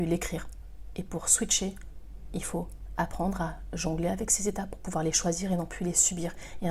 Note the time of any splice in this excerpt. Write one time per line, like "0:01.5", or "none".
0:00.9